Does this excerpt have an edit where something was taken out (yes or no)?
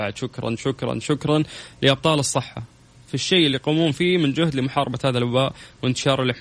yes